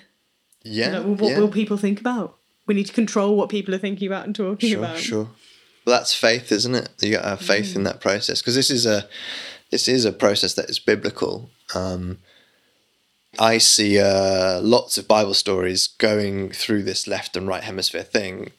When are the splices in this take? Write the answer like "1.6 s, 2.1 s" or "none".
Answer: 13.3 s